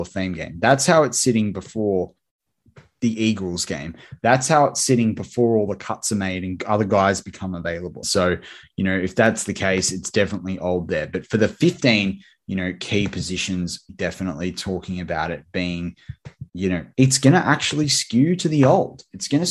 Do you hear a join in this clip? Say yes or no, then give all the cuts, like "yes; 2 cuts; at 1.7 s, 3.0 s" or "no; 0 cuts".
yes; 3 cuts; at 8.0 s, 13.9 s, 16.5 s